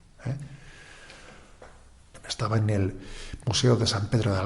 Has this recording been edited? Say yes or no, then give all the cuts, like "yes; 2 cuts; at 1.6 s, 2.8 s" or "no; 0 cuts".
yes; 1 cut; at 2.1 s